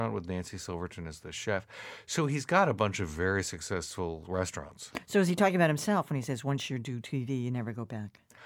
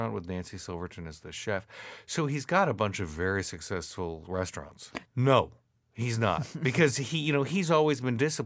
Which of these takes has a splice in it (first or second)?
second